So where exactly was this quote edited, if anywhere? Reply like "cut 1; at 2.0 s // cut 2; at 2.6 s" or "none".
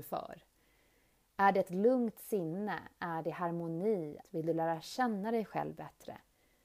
cut 1; at 4.2 s